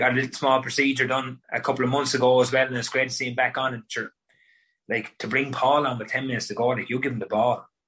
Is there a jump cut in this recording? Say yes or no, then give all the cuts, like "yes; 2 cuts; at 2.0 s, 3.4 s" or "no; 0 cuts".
yes; 1 cut; at 1.4 s